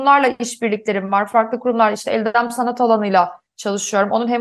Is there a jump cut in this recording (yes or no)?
no